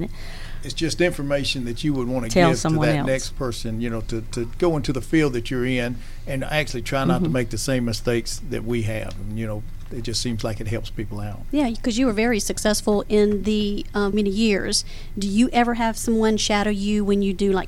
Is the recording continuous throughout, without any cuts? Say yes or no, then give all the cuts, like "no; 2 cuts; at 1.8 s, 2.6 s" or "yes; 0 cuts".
no; 1 cut; at 14.1 s